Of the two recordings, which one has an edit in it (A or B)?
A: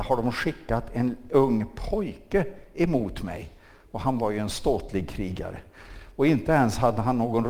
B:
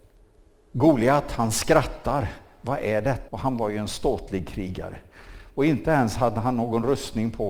B